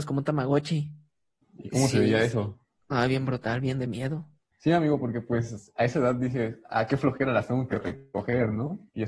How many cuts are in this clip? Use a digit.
2